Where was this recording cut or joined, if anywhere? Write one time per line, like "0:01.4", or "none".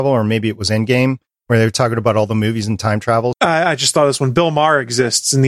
0:03.3

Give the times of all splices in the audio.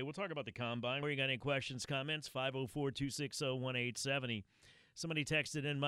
0:01.0

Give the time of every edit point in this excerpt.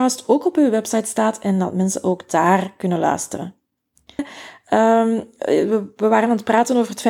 0:04.2

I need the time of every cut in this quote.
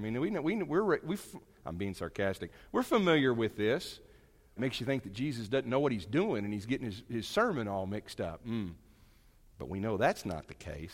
0:04.6

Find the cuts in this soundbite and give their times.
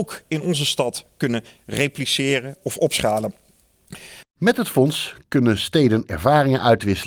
0:04.2

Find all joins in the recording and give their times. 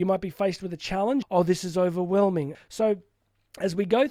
0:01.2
0:02.5

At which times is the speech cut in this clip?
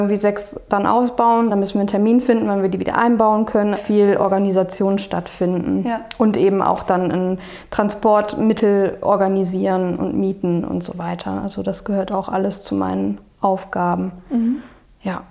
0:01.5
0:03.7

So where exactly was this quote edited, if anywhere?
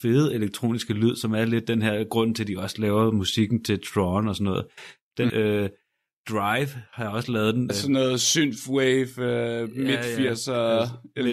0:05.3
0:07.7

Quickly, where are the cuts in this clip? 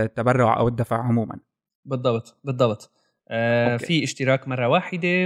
none

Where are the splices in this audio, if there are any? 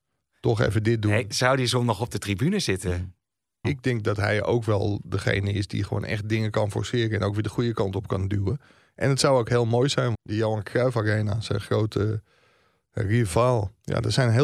0:03.6
0:10.1

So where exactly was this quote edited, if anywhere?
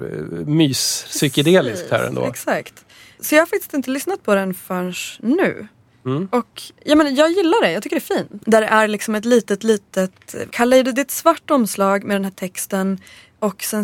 0:08.4
0:10.5

